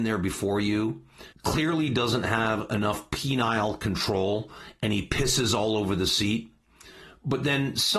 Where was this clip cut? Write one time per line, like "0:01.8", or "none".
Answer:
0:01.3